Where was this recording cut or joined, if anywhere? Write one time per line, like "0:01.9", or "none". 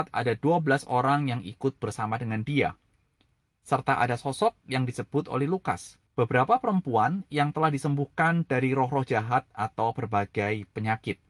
0:06.1